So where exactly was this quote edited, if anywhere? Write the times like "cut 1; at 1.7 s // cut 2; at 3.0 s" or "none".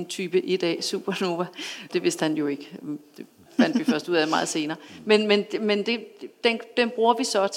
none